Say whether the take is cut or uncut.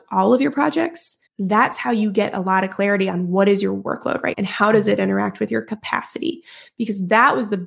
cut